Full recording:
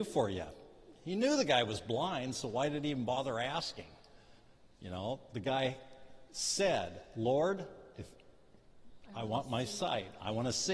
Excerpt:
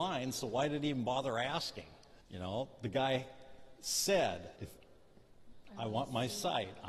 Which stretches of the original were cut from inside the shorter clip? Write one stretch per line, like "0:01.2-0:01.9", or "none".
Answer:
0:04.2-0:04.7
0:07.1-0:07.9